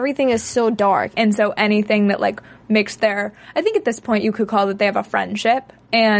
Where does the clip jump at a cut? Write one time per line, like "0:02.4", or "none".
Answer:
0:01.1